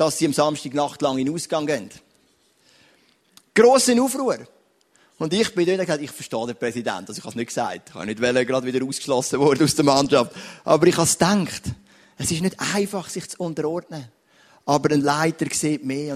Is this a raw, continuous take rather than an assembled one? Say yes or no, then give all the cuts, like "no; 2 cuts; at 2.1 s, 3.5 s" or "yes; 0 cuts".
yes; 0 cuts